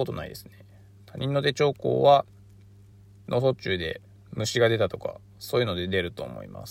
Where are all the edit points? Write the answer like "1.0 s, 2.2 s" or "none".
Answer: none